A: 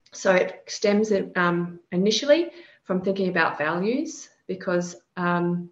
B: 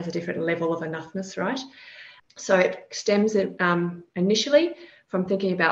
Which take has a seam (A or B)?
B